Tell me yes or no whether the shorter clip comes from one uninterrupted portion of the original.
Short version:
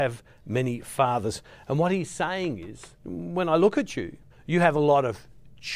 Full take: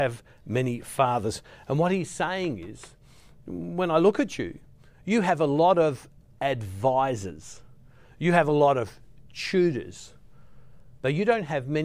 no